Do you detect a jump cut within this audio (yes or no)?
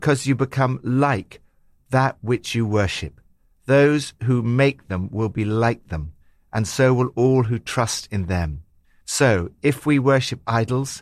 no